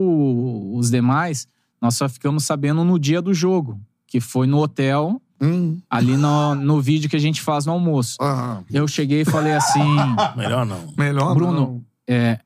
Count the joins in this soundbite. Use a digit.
1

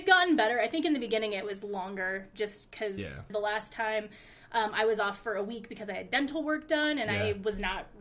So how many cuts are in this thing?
1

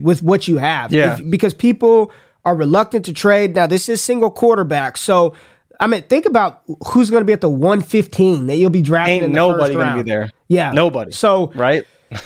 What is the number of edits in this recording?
0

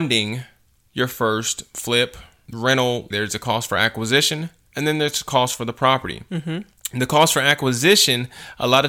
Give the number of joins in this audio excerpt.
1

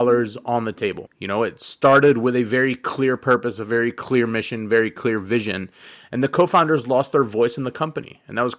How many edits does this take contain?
1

